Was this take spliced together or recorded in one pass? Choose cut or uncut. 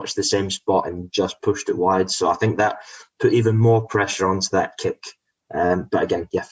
uncut